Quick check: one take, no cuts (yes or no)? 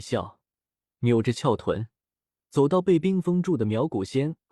yes